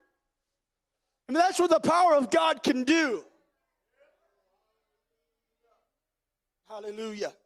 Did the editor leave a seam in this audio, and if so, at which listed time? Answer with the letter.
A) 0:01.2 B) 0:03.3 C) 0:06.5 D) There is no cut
A